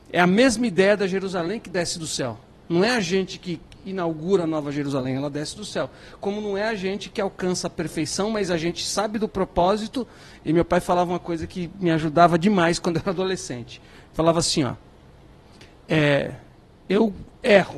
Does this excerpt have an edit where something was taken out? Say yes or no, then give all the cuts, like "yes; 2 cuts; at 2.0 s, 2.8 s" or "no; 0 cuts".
no; 0 cuts